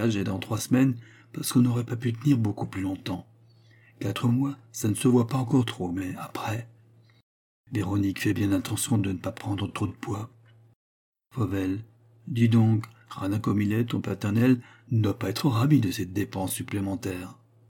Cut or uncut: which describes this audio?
uncut